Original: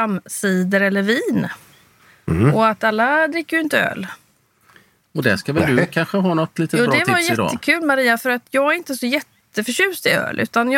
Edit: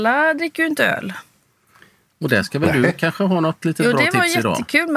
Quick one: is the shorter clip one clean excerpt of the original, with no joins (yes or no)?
yes